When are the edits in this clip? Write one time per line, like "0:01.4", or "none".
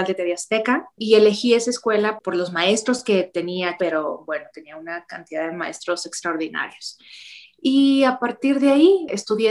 0:03.8